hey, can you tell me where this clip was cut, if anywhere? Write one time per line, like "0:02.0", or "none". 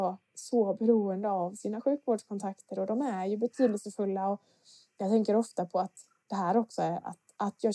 none